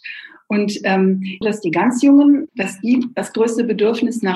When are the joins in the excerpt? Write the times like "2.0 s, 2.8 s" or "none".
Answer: 1.4 s, 2.5 s